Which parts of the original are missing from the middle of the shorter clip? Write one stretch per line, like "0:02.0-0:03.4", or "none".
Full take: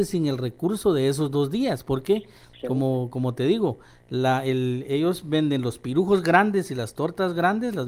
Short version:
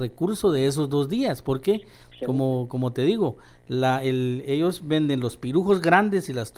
none